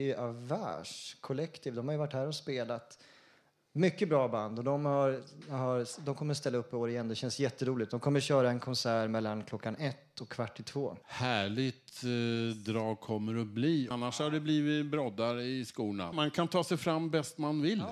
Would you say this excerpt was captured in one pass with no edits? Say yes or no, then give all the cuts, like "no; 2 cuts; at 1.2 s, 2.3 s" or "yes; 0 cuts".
no; 3 cuts; at 11.0 s, 13.9 s, 16.1 s